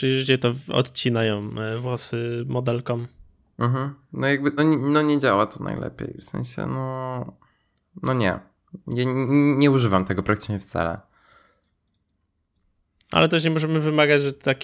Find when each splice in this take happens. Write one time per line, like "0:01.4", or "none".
0:04.6